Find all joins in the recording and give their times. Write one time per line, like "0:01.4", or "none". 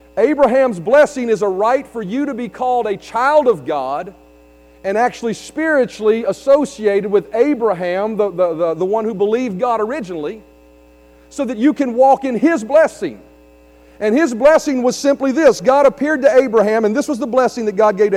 none